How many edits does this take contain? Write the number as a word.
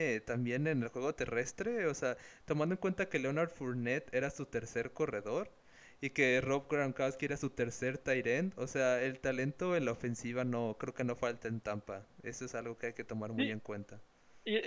zero